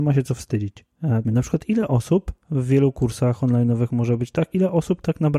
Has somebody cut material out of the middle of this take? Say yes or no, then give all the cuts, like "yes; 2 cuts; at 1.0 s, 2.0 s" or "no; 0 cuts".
yes; 1 cut; at 1.2 s